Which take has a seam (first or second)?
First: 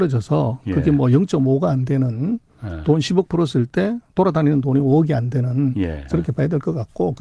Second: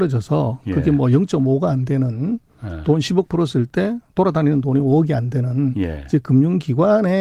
first